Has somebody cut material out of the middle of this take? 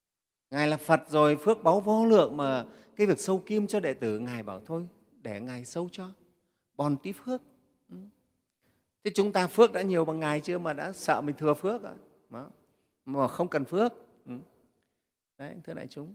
no; 0 cuts

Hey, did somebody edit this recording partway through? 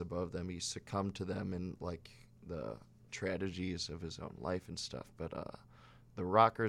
no; 0 cuts

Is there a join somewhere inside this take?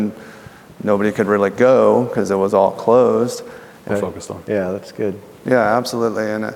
yes; 1 cut; at 3.9 s

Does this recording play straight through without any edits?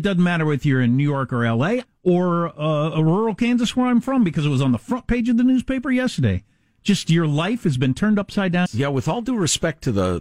no; 2 cuts; at 1.8 s, 8.7 s

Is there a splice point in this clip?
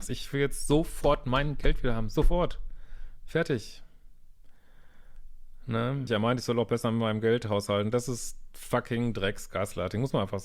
yes; 1 cut; at 6.1 s

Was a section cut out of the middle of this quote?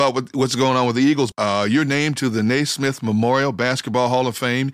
yes; 1 cut; at 1.3 s

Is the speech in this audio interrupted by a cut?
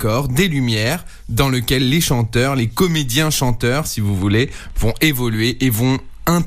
no; 0 cuts

